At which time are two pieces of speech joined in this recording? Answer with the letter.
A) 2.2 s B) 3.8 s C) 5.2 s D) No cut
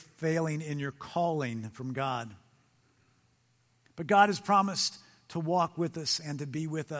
B